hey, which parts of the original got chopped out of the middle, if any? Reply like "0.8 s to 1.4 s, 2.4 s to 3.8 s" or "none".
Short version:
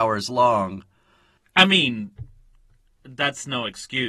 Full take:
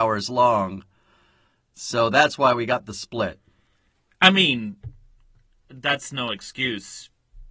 1.4 s to 4.0 s